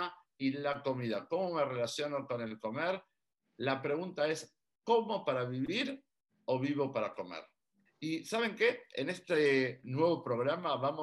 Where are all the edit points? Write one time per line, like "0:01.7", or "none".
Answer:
0:07.9
0:09.8